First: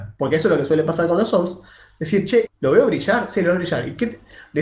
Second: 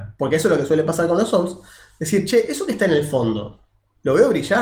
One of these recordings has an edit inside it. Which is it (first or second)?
first